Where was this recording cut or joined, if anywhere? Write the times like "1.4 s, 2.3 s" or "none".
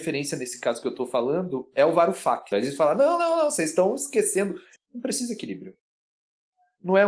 2.5 s, 4.8 s